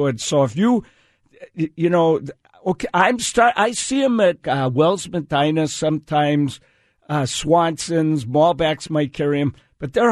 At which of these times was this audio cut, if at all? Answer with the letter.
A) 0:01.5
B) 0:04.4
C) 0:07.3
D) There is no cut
B